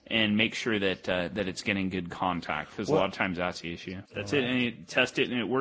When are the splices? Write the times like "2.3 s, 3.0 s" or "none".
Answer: 4.0 s